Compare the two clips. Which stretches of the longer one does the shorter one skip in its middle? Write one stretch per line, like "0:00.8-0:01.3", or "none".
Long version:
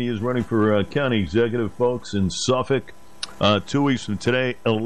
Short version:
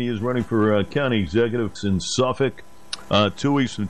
0:01.8-0:02.1